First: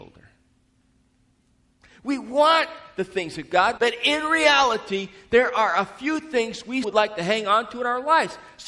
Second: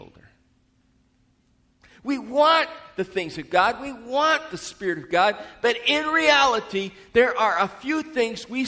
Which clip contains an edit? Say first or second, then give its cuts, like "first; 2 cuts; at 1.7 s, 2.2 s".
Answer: first; 2 cuts; at 3.8 s, 6.8 s